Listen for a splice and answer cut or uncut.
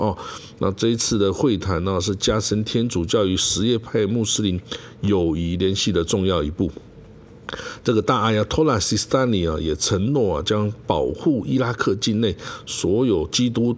uncut